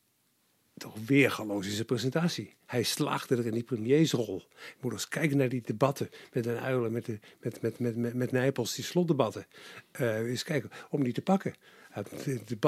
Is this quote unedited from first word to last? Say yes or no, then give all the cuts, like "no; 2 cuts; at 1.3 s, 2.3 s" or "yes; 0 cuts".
yes; 0 cuts